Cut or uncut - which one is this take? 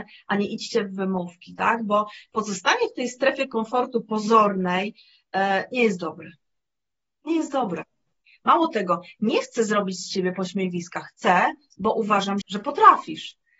cut